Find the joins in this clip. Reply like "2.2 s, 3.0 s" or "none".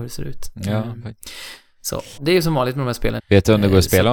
2.2 s, 3.2 s